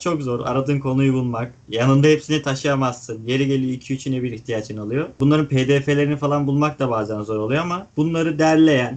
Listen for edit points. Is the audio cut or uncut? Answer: uncut